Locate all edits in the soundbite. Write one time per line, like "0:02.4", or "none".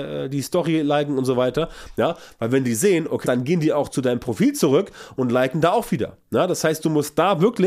0:01.9
0:03.2